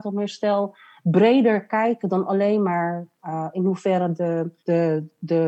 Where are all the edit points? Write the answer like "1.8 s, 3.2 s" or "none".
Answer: 4.6 s